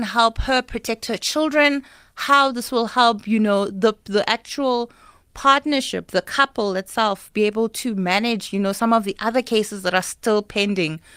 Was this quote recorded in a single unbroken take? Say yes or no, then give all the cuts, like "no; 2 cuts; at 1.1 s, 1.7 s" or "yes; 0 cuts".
yes; 0 cuts